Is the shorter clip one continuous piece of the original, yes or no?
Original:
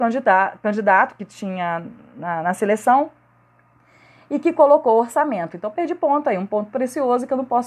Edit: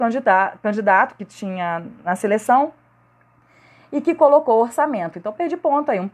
no